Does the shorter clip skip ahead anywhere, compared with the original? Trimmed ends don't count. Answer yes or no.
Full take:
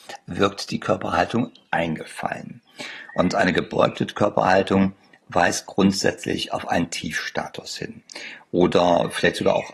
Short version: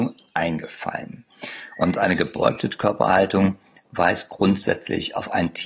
no